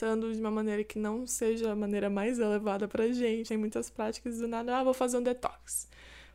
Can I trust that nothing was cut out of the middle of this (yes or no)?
no